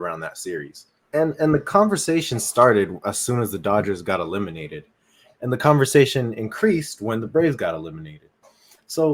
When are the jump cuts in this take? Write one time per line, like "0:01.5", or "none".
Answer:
0:01.0